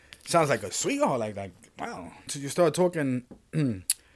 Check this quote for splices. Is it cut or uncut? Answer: cut